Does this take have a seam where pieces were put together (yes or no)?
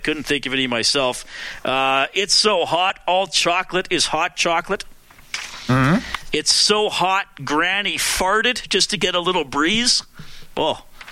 no